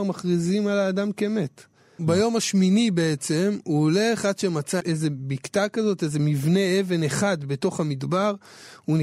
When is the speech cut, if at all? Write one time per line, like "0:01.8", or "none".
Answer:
0:02.0
0:04.8